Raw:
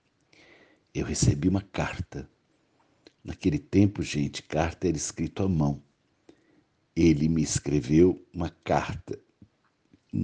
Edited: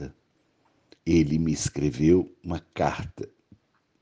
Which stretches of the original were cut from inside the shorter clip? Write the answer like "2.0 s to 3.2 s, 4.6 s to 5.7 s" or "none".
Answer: 3.1 s to 6.9 s